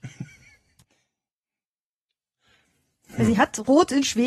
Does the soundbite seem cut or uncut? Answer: uncut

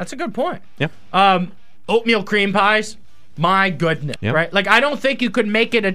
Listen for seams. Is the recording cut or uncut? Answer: cut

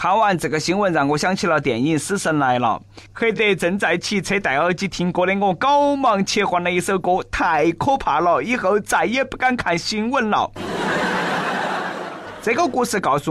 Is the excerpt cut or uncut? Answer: uncut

